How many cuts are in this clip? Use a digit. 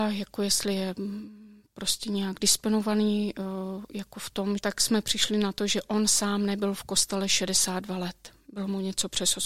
1